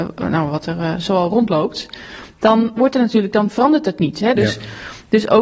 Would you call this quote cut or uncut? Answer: cut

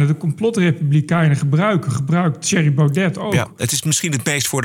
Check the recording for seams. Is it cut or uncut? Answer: uncut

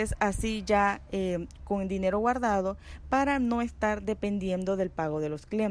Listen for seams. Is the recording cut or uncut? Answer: cut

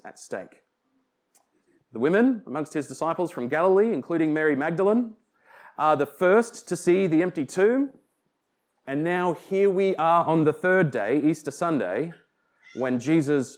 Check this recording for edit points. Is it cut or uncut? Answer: cut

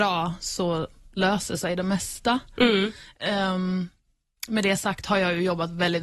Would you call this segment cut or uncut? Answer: uncut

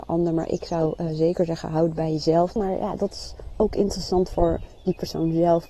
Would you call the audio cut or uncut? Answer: cut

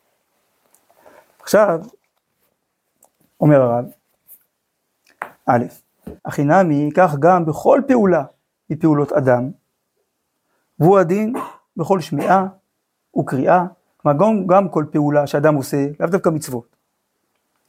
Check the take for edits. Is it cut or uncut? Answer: cut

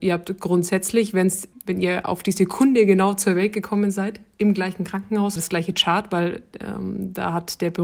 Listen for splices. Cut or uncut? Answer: cut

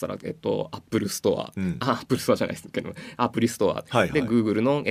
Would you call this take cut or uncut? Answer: uncut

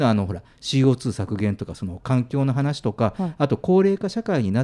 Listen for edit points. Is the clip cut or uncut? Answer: uncut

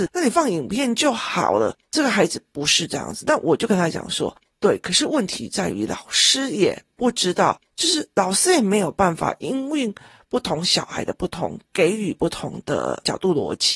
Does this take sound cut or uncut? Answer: uncut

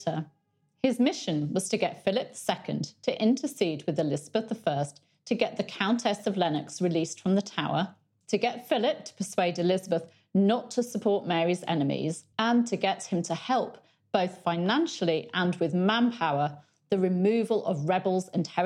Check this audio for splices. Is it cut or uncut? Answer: cut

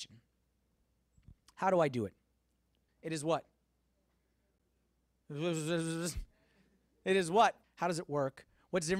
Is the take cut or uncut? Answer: cut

